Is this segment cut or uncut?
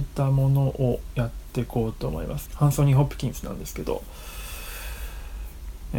cut